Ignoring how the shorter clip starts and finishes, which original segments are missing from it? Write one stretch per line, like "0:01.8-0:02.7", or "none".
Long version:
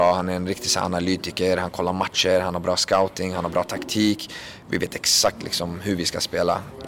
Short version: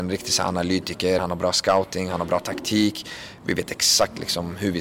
0:01.6-0:02.4